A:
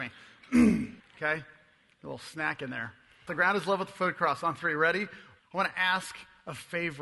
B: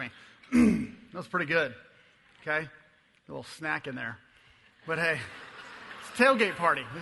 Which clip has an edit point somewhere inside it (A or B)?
A